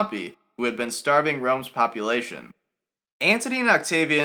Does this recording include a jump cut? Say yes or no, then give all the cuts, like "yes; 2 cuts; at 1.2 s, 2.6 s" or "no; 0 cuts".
no; 0 cuts